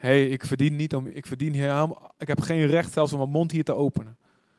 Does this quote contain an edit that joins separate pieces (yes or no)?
no